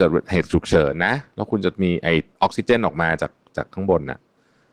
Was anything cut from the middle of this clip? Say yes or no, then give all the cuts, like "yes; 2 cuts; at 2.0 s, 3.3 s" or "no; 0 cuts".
no; 0 cuts